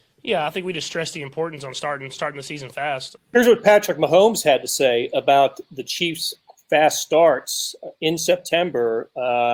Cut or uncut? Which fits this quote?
cut